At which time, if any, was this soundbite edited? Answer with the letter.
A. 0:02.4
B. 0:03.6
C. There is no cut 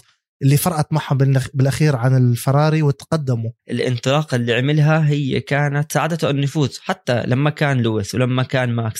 B